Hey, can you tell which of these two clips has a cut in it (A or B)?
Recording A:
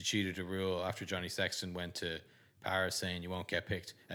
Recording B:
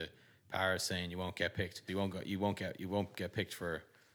B